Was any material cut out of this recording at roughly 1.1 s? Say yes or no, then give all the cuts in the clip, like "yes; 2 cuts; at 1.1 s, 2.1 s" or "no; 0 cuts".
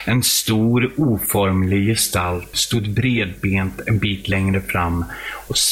no; 1 cut; at 2.5 s